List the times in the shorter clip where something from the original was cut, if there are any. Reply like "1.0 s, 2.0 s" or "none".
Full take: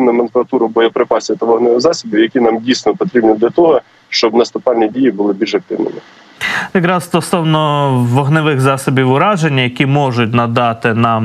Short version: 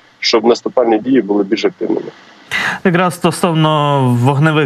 none